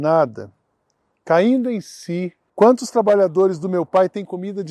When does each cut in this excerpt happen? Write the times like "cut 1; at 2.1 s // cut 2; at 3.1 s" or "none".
cut 1; at 2.5 s